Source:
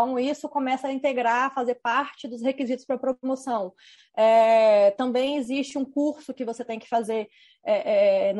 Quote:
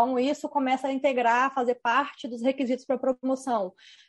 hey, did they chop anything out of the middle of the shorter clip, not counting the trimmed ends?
no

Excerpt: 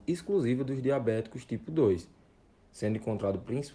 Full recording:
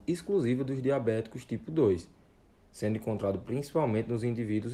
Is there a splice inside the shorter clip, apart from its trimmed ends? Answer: no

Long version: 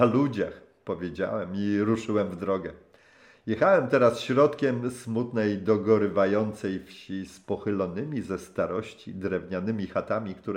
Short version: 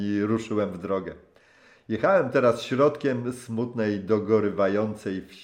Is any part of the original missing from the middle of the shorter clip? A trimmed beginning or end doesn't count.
no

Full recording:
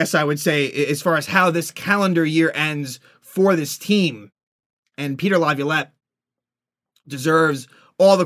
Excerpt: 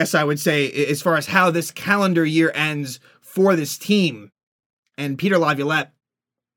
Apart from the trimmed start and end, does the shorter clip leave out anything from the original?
no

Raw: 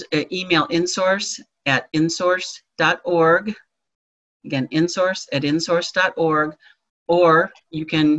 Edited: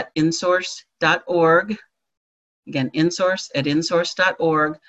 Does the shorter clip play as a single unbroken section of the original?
yes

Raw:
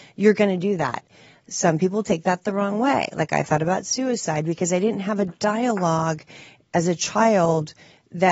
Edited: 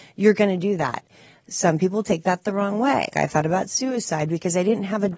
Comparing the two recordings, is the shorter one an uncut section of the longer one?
no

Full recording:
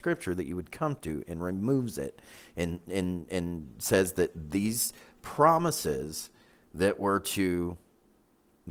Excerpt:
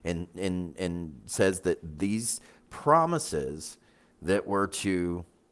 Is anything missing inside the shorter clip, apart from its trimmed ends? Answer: no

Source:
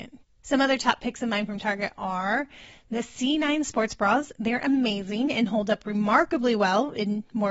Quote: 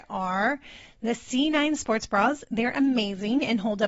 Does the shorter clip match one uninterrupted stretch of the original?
yes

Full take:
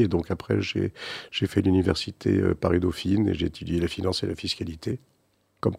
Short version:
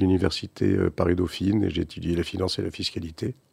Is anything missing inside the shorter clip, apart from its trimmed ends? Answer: no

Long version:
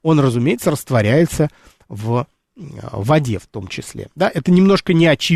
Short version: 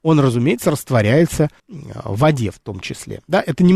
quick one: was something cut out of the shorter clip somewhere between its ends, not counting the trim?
yes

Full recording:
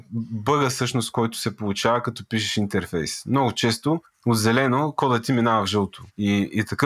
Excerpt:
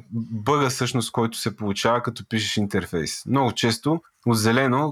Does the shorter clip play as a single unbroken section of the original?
yes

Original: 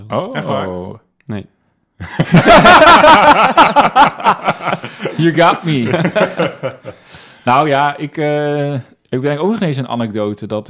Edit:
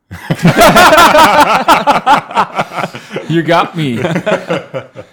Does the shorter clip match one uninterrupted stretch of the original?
yes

